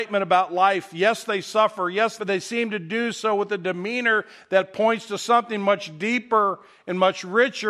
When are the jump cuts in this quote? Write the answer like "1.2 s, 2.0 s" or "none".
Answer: 2.2 s